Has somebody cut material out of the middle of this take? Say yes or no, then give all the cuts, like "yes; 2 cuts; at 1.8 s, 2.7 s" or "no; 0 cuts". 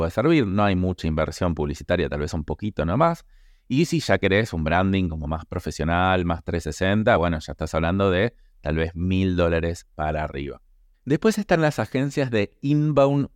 no; 0 cuts